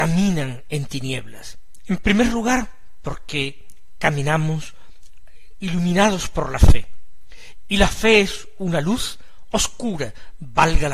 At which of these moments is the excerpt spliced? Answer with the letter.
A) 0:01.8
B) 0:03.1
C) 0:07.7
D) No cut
A